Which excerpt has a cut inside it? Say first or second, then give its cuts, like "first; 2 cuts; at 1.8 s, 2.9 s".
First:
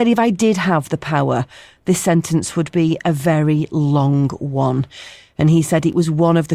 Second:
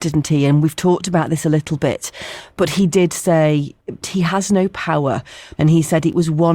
second; 2 cuts; at 4.0 s, 5.5 s